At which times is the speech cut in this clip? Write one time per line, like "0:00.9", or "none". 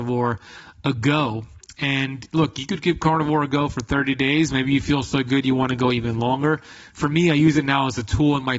none